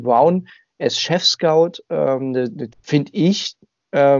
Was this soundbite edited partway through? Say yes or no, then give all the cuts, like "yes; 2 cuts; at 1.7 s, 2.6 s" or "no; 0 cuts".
yes; 1 cut; at 2.7 s